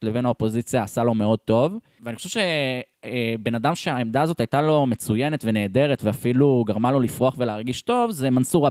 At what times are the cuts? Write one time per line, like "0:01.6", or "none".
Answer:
0:02.0